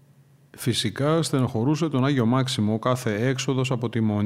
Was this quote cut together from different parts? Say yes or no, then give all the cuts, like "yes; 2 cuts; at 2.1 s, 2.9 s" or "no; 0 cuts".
no; 0 cuts